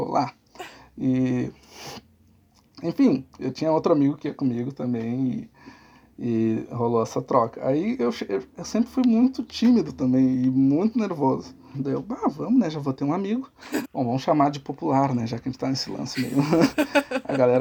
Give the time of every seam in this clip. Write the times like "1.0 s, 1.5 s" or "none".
11.7 s, 13.8 s